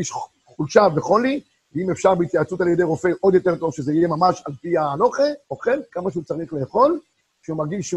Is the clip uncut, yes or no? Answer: no